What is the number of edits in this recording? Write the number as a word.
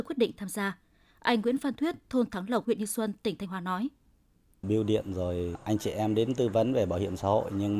two